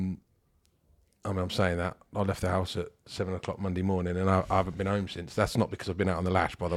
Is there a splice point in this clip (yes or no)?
no